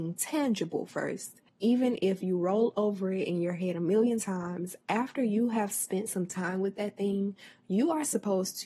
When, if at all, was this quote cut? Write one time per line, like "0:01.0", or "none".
0:01.5

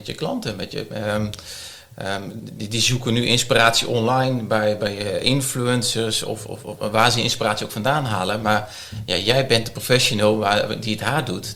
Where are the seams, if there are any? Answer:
none

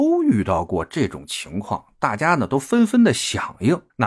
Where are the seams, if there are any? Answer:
none

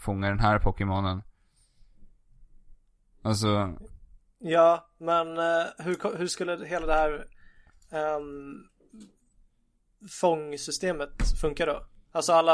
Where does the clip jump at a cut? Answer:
none

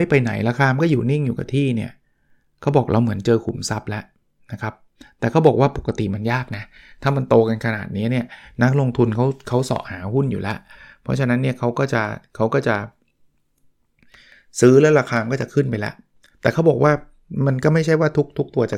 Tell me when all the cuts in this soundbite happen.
none

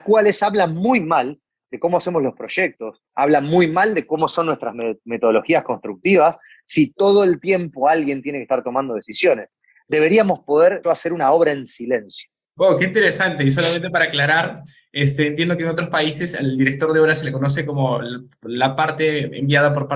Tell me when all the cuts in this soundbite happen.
0:03.1
0:10.8
0:12.6

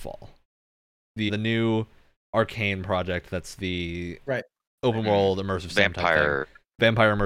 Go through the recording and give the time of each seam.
0:01.3

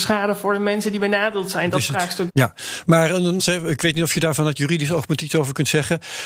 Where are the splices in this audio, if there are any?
0:02.3
0:03.4

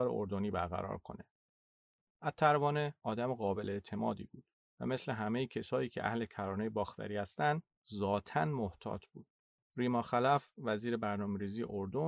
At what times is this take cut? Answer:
0:02.1
0:09.6

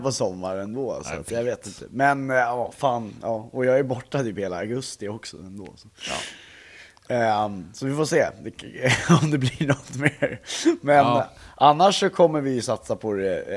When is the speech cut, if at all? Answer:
none

